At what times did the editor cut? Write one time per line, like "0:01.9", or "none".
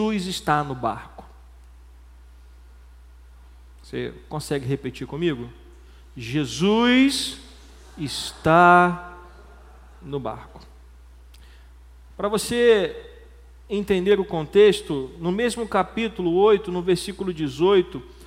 none